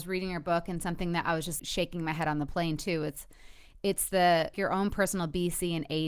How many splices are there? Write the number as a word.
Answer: two